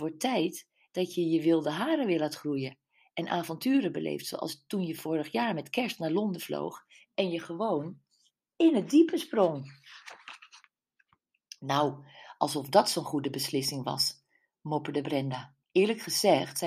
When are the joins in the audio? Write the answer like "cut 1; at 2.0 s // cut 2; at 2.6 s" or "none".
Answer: cut 1; at 15.6 s